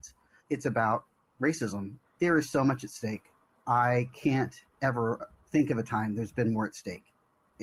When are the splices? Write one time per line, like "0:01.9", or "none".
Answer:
0:02.0